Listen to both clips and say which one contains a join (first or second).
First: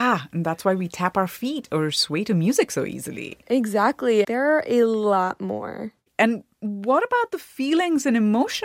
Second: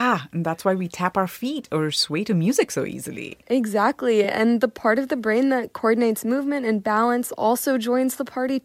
first